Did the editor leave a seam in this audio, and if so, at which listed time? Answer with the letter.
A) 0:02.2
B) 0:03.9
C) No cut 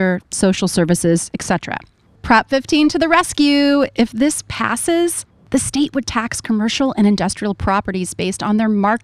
A